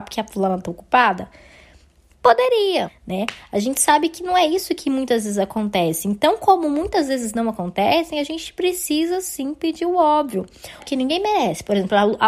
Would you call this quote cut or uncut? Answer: cut